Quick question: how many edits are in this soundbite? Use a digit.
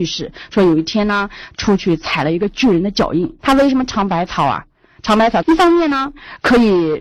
2